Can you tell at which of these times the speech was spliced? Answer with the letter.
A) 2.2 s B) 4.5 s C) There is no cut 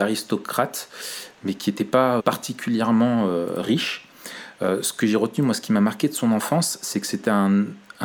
A